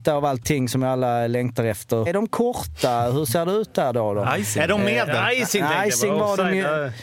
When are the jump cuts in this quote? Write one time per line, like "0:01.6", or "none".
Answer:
0:02.1

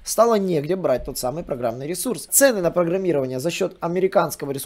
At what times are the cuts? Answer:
0:02.3

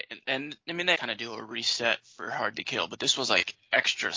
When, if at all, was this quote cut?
0:00.9

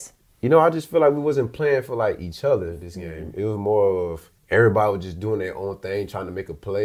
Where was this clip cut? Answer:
0:04.4

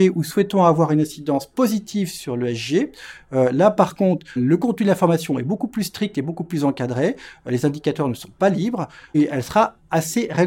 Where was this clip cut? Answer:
0:04.4
0:09.1

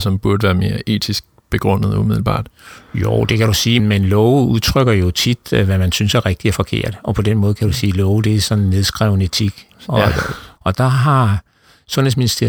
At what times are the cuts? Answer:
0:03.8
0:10.6

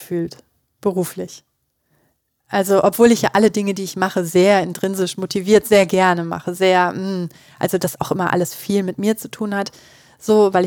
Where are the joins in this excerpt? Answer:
none

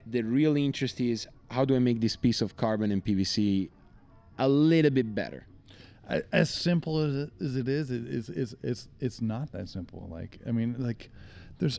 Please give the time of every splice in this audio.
none

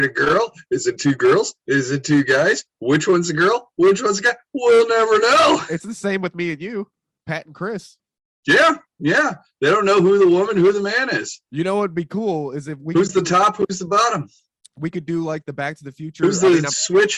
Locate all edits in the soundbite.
none

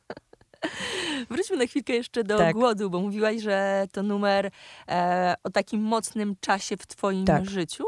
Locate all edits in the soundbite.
none

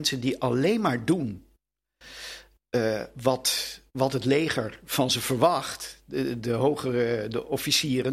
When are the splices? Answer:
0:03.9

